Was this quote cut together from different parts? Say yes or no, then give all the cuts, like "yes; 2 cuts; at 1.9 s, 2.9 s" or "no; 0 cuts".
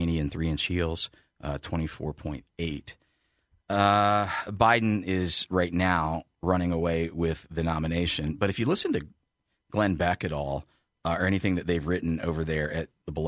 no; 0 cuts